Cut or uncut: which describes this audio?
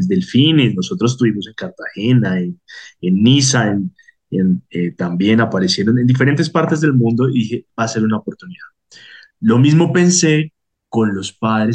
uncut